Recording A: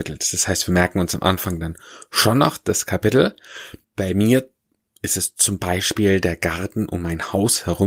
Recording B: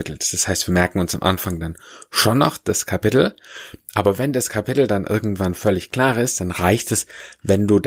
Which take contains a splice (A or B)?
A